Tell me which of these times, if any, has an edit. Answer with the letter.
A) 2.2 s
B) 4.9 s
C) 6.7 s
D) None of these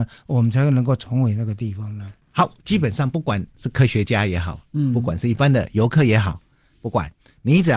D